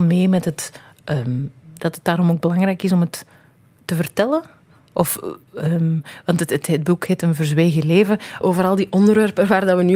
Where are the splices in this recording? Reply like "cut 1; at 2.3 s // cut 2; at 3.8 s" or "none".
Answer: cut 1; at 8.4 s

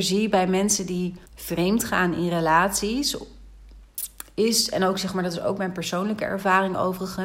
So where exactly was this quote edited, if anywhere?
cut 1; at 1.3 s

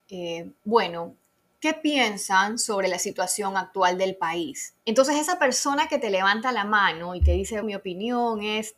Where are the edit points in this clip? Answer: cut 1; at 4.8 s // cut 2; at 7.6 s

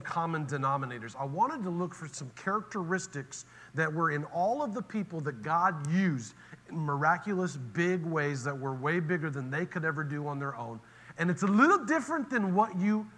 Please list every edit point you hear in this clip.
cut 1; at 11.1 s

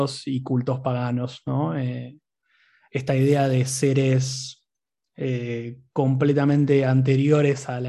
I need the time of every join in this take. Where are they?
none

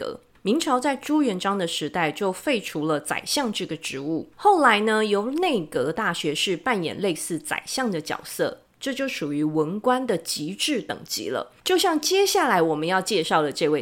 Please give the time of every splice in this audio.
cut 1; at 11.6 s

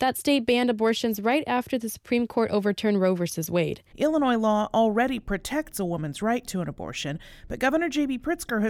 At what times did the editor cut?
cut 1; at 3.9 s

